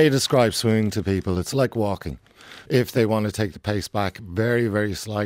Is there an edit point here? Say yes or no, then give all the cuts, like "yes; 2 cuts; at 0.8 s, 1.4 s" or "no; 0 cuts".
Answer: yes; 1 cut; at 2.7 s